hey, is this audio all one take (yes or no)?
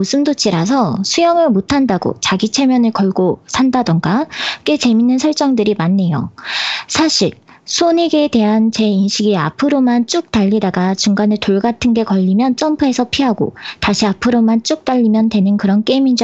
yes